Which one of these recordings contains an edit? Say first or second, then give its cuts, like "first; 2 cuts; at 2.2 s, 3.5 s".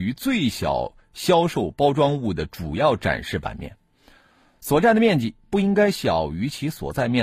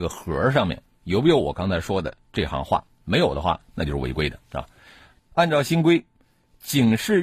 second; 1 cut; at 5.2 s